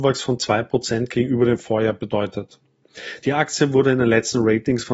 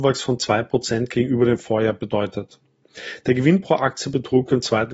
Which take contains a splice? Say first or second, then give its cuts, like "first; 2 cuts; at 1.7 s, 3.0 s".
first; 1 cut; at 3.2 s